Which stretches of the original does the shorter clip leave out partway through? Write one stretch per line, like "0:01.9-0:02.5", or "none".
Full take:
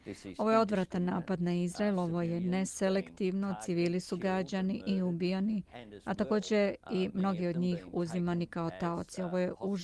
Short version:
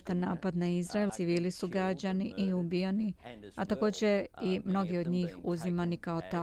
0:01.9-0:03.6